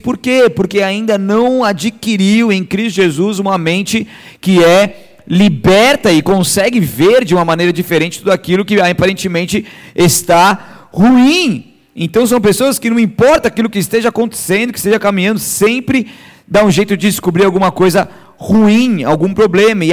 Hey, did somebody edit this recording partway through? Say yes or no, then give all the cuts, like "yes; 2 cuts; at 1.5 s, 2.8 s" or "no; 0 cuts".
no; 0 cuts